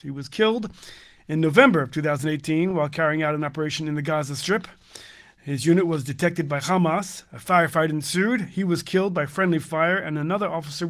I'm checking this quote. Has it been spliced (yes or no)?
no